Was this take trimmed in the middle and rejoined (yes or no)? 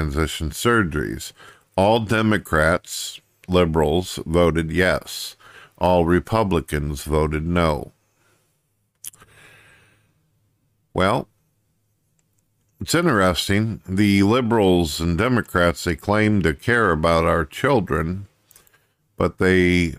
no